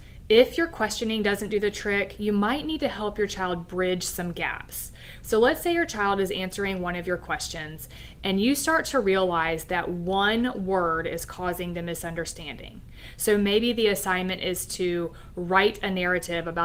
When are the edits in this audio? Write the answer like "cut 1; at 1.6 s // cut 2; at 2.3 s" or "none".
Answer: cut 1; at 5.2 s